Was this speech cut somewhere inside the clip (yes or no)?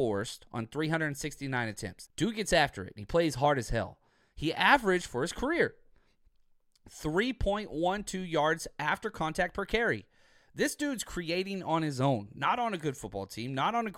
yes